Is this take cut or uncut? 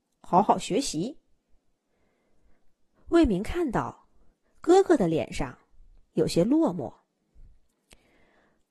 uncut